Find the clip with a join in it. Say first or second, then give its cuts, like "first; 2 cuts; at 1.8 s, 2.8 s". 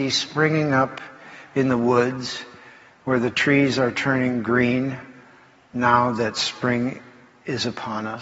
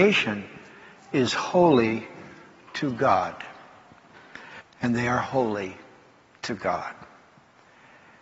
second; 1 cut; at 4.6 s